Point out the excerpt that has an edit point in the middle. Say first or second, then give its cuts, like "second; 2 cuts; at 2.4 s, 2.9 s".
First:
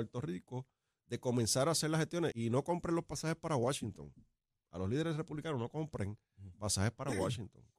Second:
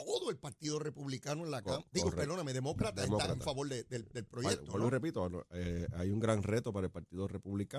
first; 1 cut; at 2.3 s